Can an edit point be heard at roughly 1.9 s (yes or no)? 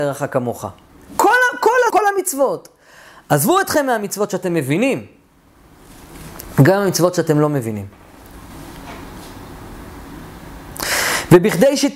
yes